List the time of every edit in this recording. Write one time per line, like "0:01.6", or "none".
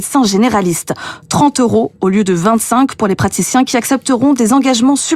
none